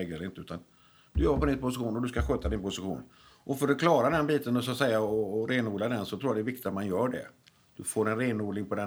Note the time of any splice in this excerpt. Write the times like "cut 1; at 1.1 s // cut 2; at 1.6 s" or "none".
none